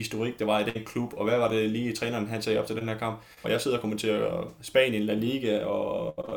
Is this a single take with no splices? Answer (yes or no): no